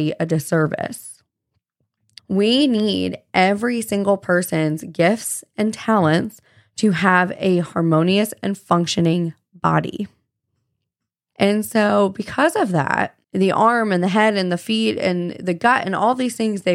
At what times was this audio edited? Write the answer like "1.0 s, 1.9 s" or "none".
11.3 s, 13.2 s